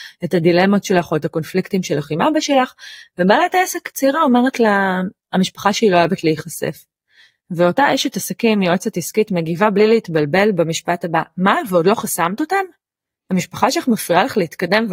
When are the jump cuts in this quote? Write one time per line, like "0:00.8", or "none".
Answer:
none